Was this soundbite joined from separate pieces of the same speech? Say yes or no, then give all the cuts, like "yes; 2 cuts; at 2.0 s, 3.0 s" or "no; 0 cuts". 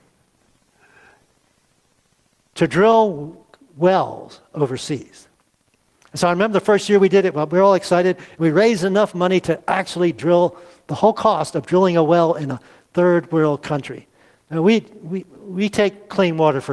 no; 0 cuts